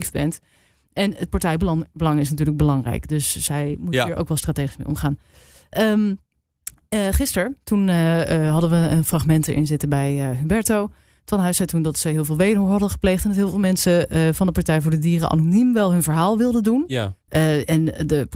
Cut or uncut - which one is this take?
cut